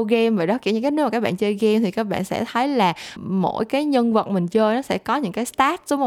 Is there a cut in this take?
yes; 1 cut; at 3.2 s

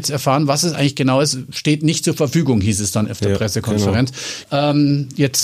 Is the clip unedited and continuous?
no; 1 cut; at 4.4 s

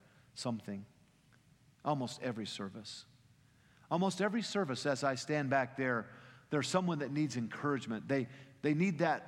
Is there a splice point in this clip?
no; 0 cuts

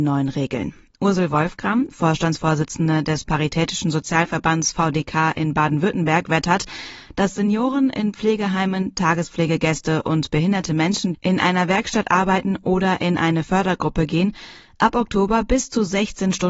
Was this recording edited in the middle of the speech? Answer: yes; 1 cut; at 11.1 s

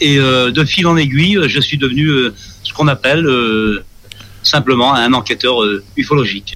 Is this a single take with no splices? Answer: yes; 0 cuts

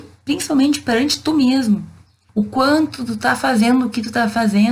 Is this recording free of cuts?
no; 1 cut; at 2.3 s

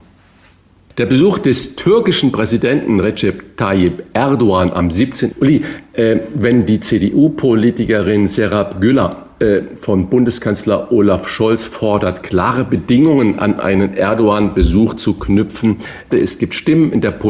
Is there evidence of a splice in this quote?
yes; 2 cuts; at 5.3 s, 16.1 s

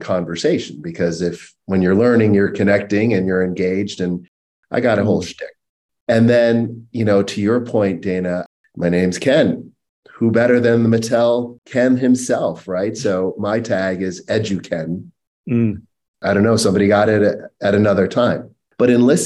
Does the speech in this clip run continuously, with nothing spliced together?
no; 1 cut; at 16.1 s

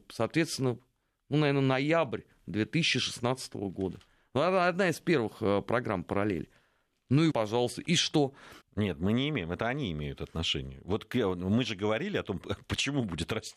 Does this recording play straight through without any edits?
no; 2 cuts; at 7.3 s, 8.6 s

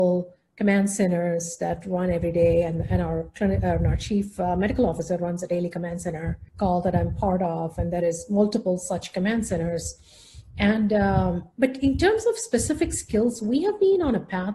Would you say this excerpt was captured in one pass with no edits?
no; 1 cut; at 6.5 s

